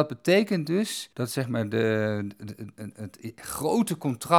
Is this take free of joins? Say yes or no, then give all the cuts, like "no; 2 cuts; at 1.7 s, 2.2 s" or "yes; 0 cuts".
no; 1 cut; at 1.1 s